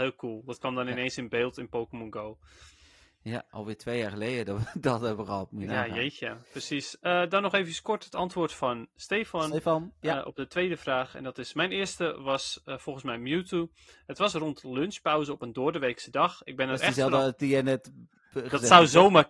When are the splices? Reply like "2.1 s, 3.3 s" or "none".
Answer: none